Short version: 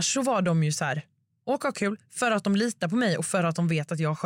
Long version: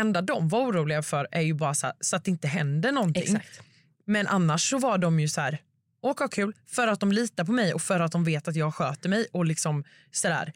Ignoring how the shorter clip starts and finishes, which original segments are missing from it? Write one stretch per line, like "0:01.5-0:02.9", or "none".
none

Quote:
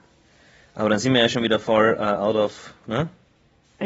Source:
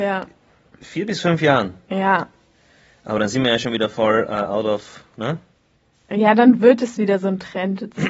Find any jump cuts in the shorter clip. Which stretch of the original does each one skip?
none

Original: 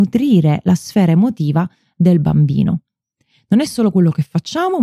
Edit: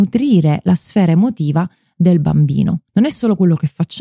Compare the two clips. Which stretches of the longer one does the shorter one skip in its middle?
0:02.9-0:03.4

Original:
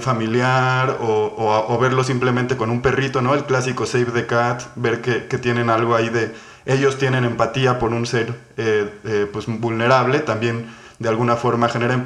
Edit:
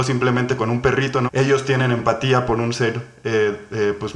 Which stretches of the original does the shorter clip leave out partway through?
0:03.3-0:06.6

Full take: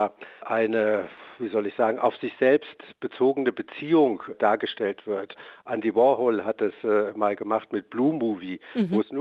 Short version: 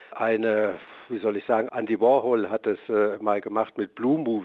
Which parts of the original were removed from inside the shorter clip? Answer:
0:02.0-0:05.6

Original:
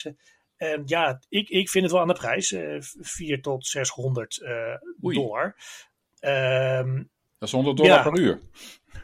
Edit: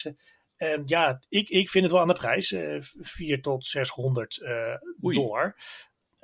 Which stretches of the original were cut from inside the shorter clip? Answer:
none

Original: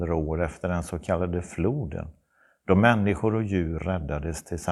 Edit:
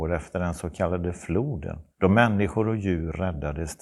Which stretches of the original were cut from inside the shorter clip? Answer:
0:02.2-0:02.6

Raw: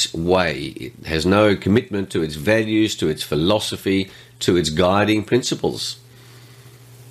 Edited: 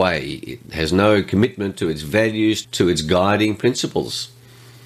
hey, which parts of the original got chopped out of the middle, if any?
0:03.0-0:04.3

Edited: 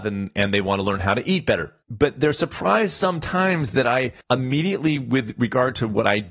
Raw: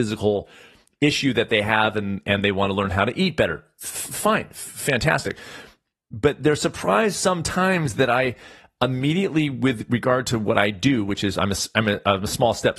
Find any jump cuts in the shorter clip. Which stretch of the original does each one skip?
0:03.7-0:06.0
0:08.4-0:08.7

